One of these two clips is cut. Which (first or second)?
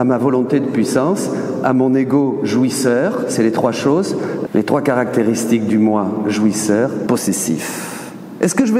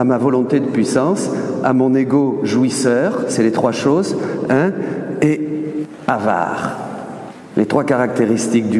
first